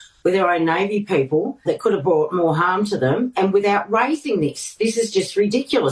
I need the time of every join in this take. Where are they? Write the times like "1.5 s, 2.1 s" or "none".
1.7 s